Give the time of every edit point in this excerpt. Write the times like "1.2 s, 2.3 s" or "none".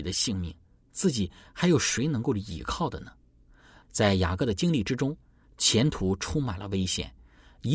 3.8 s, 5.4 s